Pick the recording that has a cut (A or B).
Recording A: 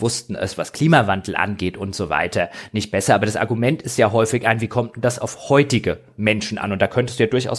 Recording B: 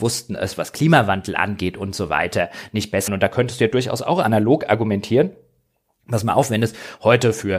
B